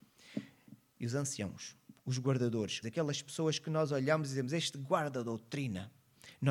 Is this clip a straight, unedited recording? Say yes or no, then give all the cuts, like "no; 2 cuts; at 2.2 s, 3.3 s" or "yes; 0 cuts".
no; 1 cut; at 2.8 s